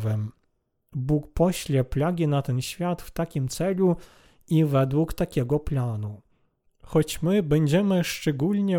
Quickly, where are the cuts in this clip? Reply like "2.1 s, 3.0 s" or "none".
6.7 s